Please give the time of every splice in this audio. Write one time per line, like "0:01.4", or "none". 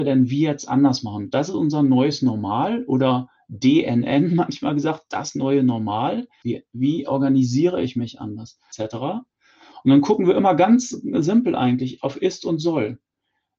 0:06.4
0:08.7

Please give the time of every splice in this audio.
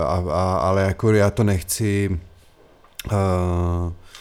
none

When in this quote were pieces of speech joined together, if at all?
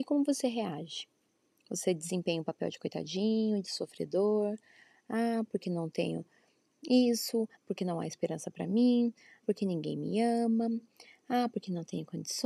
0:07.6
0:09.4

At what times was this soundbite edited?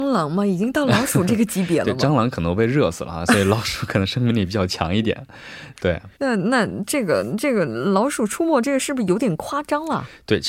0:06.1

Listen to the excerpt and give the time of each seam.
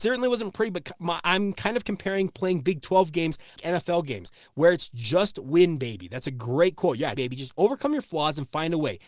0:03.6
0:07.2

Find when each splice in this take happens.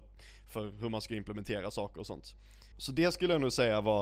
0:02.7

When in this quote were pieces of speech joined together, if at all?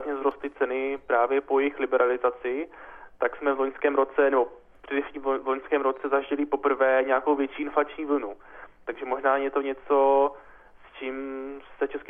none

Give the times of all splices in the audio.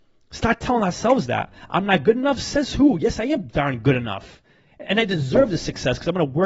none

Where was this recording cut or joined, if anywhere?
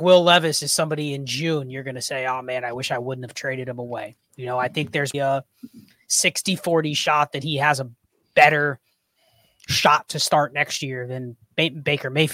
0:05.1

